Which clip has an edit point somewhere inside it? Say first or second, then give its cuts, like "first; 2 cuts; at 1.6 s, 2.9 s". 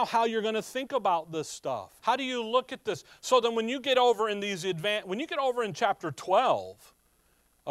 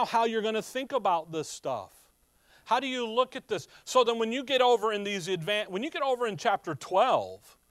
first; 1 cut; at 2.0 s